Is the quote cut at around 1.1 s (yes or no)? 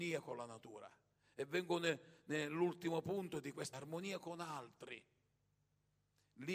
no